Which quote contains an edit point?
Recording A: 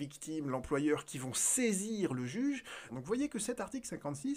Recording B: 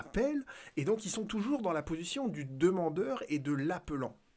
A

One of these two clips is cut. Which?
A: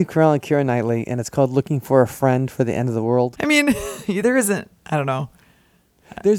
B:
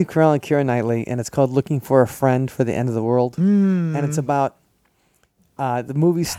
A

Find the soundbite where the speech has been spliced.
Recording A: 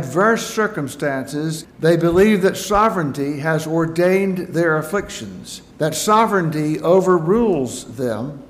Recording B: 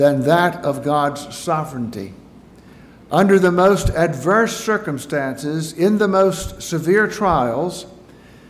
A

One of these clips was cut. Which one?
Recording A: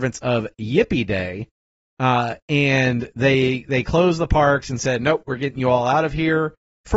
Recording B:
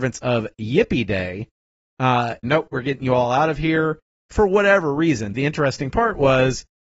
B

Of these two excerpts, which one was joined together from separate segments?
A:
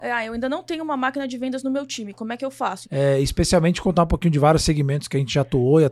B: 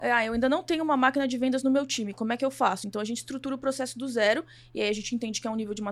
A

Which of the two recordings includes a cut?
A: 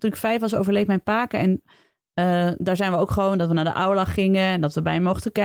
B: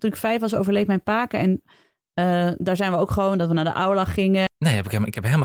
B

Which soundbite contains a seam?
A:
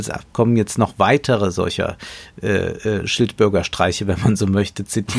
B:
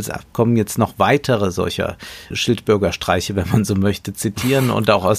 B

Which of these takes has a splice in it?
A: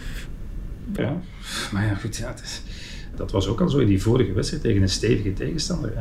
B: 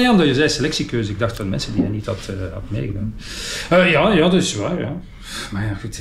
A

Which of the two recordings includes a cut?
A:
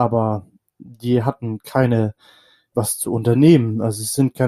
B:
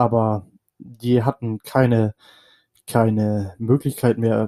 A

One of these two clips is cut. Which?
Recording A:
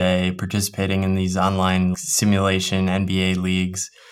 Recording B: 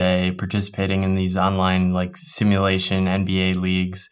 A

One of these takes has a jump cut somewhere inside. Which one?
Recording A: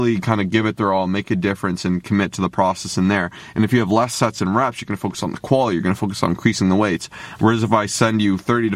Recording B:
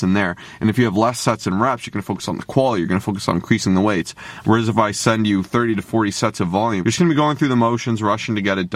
B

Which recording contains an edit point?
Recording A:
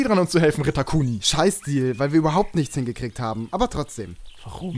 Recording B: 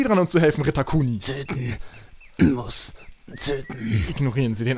B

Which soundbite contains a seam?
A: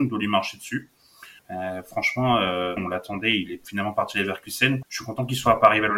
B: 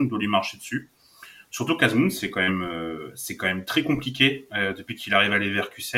A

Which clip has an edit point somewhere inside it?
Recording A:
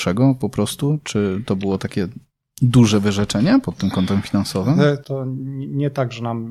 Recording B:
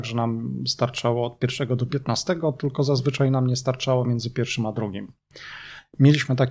A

